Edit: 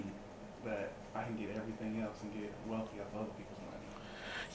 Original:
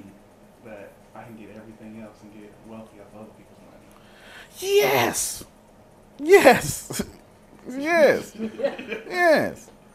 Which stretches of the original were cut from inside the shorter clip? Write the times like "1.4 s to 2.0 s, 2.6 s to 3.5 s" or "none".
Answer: none